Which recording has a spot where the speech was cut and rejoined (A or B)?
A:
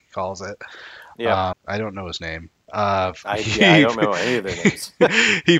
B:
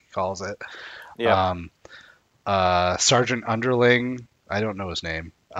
A